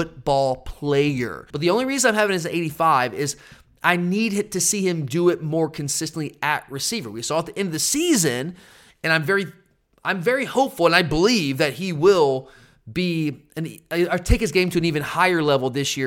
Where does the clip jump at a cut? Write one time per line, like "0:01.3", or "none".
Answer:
0:01.5

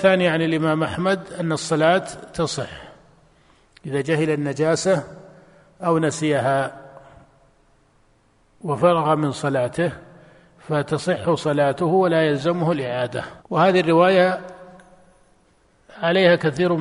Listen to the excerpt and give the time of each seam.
0:13.4

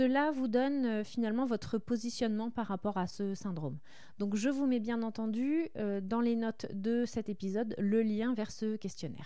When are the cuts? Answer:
none

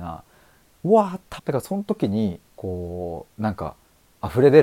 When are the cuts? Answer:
0:01.4
0:02.5

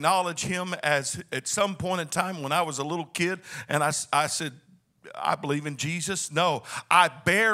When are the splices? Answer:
none

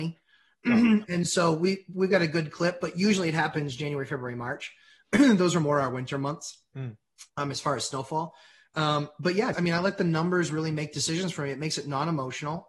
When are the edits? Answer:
0:09.5

